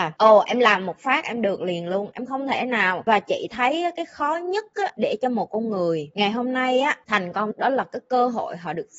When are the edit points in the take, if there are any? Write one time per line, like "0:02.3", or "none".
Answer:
0:07.5